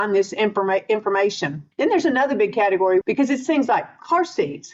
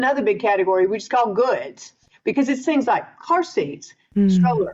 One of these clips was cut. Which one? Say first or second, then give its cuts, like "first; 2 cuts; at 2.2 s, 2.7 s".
first; 1 cut; at 3.0 s